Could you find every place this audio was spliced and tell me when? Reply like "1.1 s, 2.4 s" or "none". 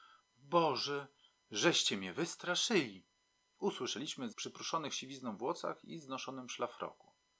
4.3 s